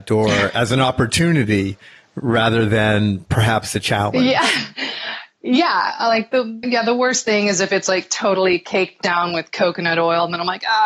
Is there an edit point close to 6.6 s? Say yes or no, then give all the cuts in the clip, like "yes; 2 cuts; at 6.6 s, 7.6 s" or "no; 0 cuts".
yes; 1 cut; at 6.6 s